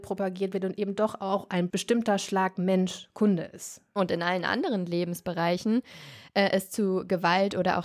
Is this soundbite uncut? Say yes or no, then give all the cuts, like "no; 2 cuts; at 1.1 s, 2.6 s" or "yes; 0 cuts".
no; 1 cut; at 4.0 s